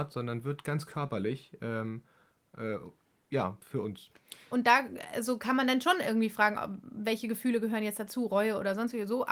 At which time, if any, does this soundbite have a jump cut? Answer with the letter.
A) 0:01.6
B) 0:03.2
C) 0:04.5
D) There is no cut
C